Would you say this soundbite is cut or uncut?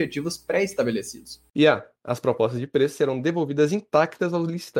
cut